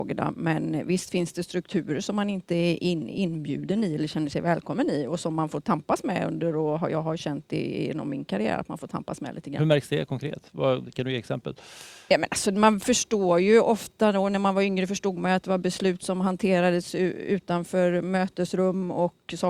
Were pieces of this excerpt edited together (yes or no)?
no